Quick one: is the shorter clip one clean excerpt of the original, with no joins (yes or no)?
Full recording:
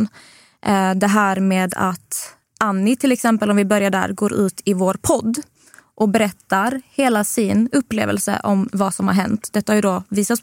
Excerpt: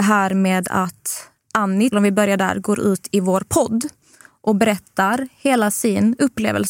no